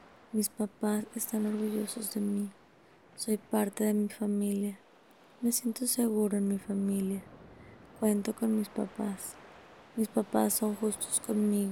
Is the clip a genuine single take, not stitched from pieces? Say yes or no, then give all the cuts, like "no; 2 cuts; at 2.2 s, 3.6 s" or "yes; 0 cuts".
yes; 0 cuts